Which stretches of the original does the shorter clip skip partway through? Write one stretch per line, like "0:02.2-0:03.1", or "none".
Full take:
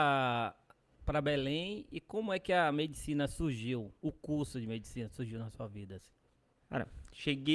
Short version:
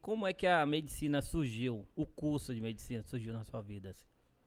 none